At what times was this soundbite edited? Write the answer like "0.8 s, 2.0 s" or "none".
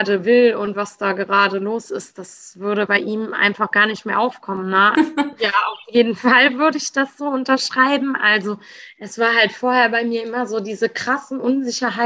4.9 s